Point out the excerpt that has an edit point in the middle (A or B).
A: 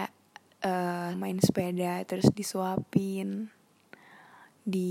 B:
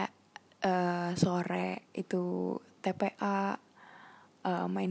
A